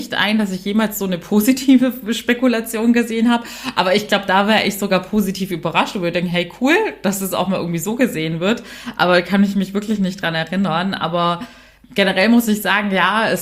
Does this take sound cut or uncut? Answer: uncut